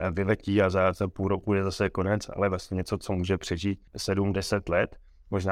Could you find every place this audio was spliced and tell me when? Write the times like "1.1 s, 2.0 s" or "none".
3.9 s